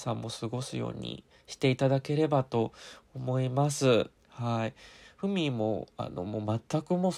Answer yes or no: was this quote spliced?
yes